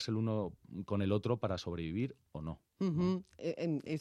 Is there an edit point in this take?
no; 0 cuts

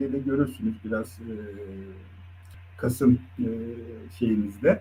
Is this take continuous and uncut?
yes; 0 cuts

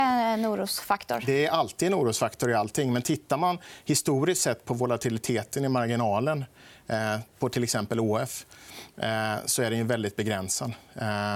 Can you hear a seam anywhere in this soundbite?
no; 0 cuts

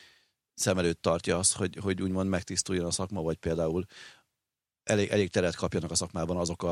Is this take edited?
yes; 1 cut; at 1.7 s

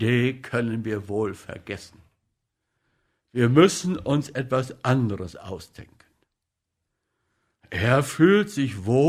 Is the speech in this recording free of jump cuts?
yes; 0 cuts

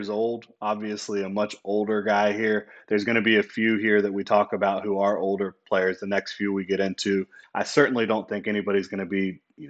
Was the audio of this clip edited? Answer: yes; 1 cut; at 7.4 s

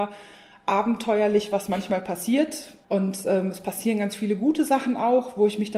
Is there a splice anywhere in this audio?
yes; 1 cut; at 2.8 s

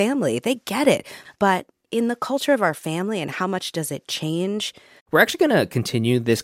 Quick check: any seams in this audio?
yes; 2 cuts; at 1.2 s, 5.0 s

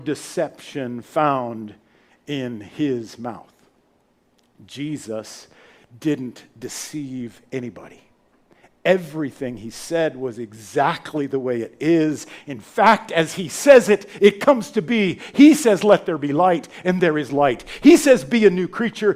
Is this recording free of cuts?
yes; 0 cuts

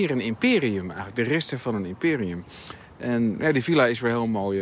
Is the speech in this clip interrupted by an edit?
no; 0 cuts

